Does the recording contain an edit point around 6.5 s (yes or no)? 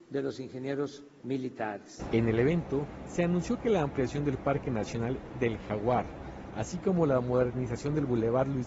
yes